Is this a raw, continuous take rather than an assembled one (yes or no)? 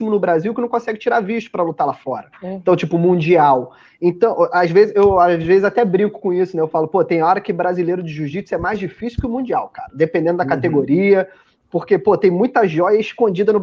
yes